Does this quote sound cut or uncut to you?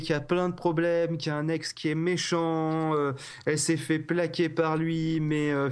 uncut